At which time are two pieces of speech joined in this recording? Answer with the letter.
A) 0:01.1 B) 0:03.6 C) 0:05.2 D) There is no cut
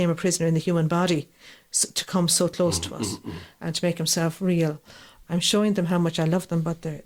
C